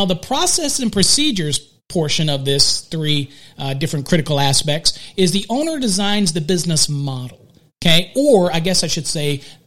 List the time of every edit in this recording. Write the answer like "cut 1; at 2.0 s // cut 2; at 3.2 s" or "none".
none

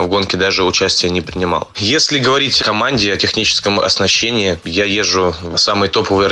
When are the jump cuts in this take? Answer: cut 1; at 2.6 s

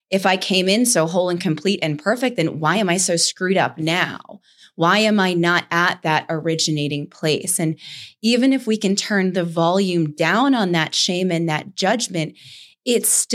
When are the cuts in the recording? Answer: none

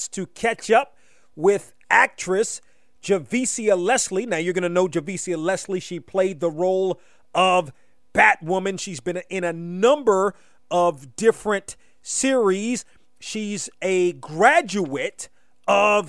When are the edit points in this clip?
none

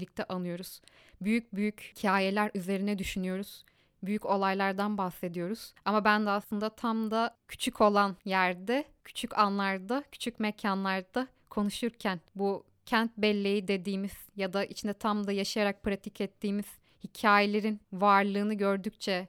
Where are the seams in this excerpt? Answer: none

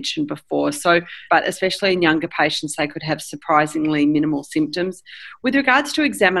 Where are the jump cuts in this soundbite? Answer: cut 1; at 1.3 s

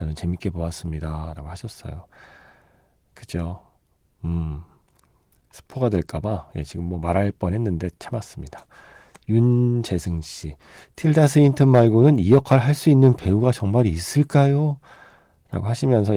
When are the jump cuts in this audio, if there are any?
none

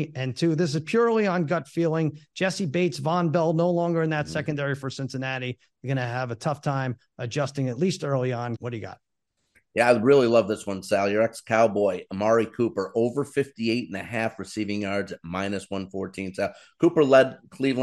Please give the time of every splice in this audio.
cut 1; at 8.5 s

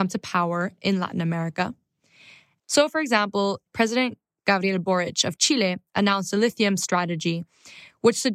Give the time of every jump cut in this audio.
cut 1; at 2.6 s // cut 2; at 3.7 s

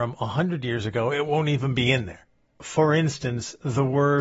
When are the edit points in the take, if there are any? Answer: cut 1; at 2.6 s

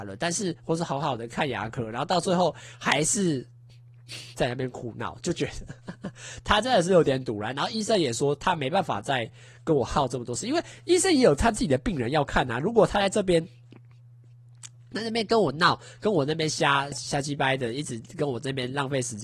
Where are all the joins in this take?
cut 1; at 16.9 s

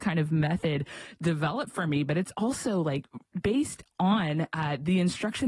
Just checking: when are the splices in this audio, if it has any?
none

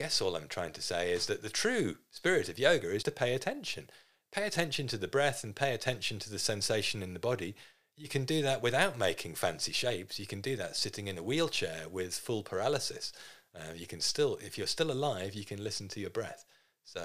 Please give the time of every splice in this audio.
cut 1; at 3.0 s

